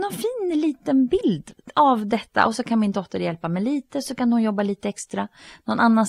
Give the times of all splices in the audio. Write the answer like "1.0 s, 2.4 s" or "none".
none